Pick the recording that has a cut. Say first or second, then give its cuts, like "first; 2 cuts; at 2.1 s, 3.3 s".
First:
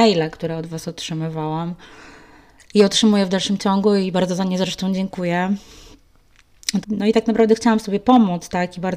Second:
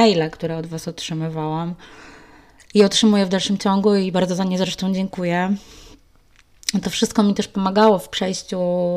first; 1 cut; at 6.8 s